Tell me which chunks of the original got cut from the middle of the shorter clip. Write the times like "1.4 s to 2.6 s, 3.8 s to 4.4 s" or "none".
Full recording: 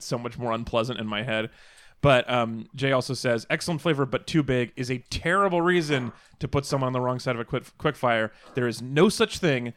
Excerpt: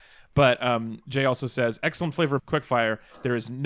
4.1 s to 7.7 s